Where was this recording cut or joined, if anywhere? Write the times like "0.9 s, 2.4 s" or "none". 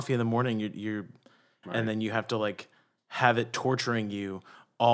1.6 s